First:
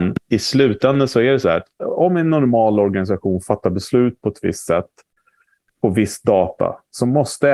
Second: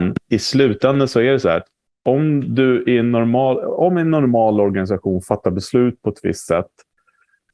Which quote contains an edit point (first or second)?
first